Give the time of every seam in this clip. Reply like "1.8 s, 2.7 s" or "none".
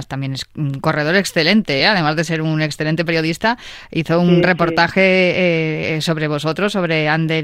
none